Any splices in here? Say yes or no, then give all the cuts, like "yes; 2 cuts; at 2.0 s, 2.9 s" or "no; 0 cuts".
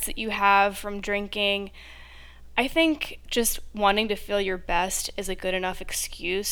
no; 0 cuts